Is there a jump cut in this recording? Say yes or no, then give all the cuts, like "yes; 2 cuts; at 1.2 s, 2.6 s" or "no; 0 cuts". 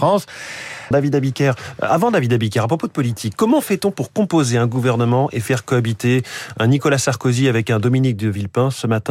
yes; 1 cut; at 0.9 s